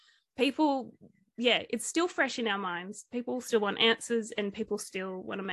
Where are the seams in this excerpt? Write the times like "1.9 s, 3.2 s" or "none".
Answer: none